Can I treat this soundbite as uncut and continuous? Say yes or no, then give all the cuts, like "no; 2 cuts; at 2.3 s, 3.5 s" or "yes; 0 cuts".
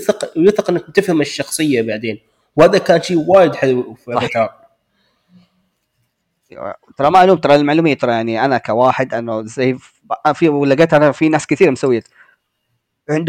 yes; 0 cuts